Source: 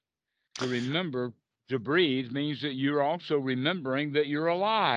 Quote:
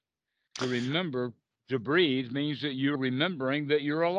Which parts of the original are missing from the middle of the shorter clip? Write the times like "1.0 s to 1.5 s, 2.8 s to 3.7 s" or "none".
2.9 s to 3.4 s